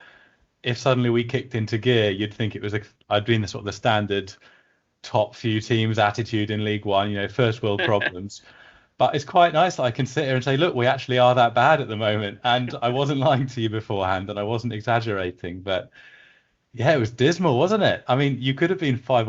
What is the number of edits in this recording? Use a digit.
0